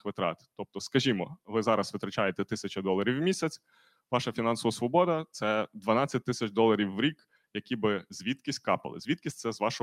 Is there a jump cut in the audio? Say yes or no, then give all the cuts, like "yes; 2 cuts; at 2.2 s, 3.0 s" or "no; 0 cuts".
no; 0 cuts